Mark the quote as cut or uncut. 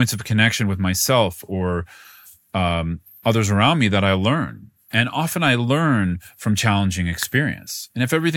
uncut